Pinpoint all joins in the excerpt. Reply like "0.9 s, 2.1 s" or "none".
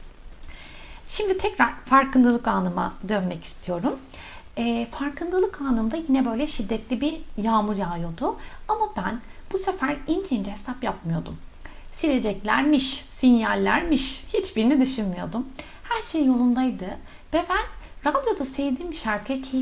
1.0 s